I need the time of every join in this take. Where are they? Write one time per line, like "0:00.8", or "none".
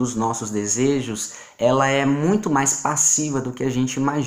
none